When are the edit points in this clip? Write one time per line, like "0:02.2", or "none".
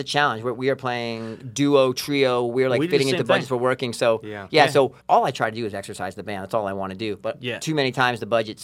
0:05.0

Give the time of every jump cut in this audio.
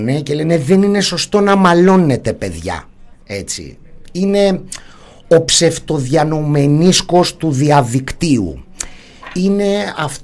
0:03.1

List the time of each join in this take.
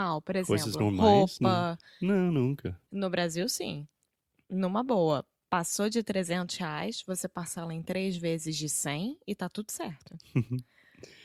none

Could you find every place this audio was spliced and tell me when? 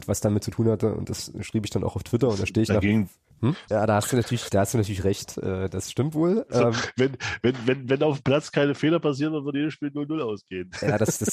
0:03.7

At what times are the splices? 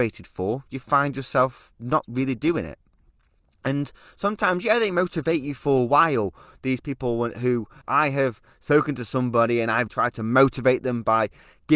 0:07.8
0:09.9

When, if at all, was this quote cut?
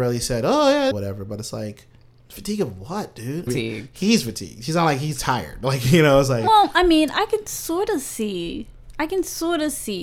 0:00.9
0:03.5

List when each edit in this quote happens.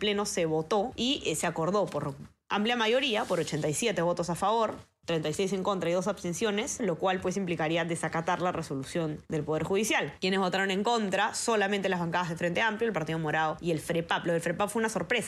0:06.8

